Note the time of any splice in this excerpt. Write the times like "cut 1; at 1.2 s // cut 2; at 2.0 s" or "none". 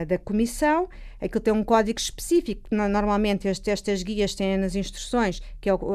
none